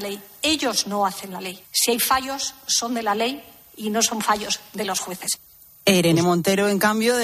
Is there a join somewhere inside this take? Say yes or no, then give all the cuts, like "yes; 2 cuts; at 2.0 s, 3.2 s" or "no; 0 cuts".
no; 0 cuts